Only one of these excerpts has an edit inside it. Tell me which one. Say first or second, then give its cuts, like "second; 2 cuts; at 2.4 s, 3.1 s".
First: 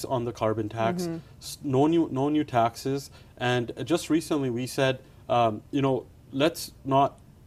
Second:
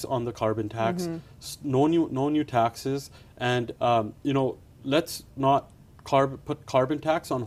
second; 1 cut; at 3.8 s